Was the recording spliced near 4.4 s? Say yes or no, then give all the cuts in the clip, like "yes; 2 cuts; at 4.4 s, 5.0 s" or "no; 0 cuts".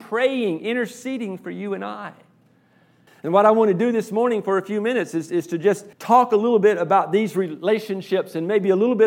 no; 2 cuts; at 3.1 s, 5.9 s